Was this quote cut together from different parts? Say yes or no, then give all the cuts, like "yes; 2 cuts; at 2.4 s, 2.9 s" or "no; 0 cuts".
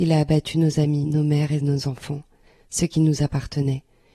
no; 0 cuts